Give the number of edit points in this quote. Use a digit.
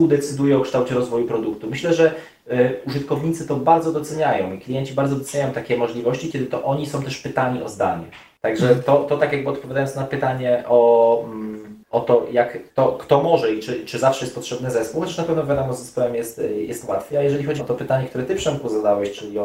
1